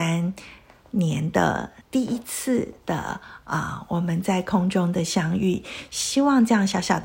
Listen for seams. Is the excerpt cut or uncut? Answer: cut